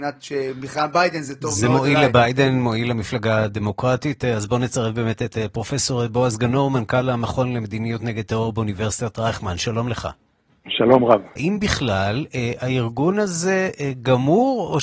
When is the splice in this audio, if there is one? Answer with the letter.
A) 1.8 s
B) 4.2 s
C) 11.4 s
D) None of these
C